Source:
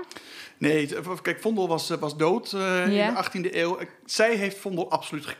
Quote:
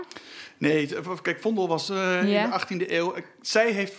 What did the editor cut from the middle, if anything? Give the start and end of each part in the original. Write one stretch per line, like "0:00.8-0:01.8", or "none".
0:01.9-0:02.5